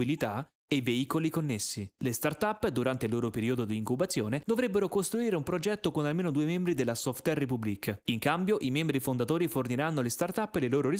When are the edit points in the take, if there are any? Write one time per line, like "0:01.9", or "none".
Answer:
none